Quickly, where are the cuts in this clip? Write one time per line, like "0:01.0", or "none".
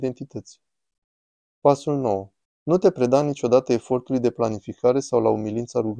0:02.4